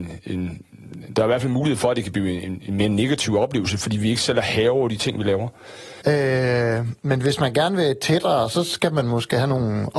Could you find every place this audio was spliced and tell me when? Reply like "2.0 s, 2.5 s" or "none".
6.0 s